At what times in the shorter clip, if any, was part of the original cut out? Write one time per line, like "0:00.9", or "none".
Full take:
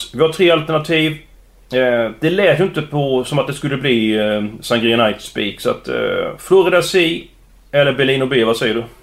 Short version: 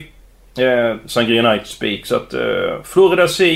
0:01.0